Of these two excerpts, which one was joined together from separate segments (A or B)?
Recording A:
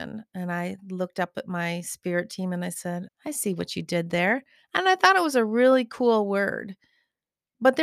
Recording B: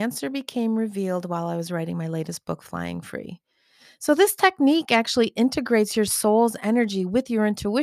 A